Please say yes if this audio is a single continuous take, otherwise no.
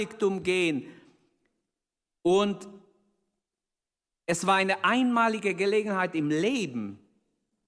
yes